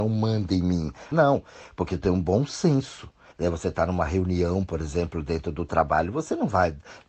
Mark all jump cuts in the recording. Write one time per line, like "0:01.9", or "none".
0:01.1
0:03.3